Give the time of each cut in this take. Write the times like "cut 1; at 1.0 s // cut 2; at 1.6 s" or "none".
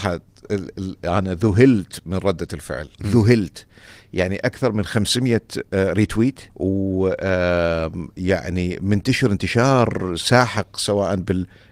cut 1; at 2.9 s // cut 2; at 6.5 s